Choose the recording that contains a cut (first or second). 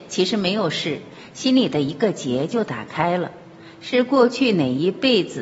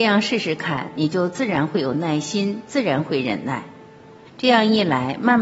second